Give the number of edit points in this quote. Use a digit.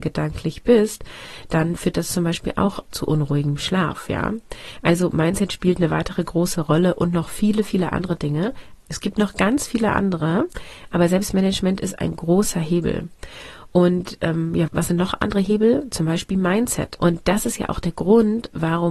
3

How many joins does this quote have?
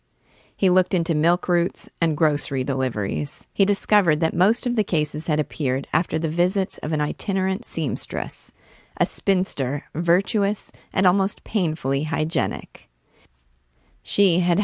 1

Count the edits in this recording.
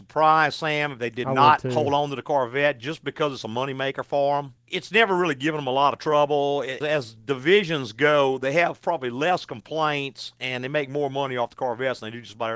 0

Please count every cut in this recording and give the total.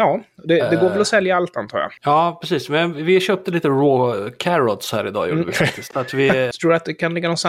2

